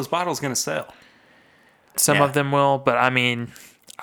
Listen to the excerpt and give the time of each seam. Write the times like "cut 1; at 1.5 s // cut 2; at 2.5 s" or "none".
cut 1; at 1.9 s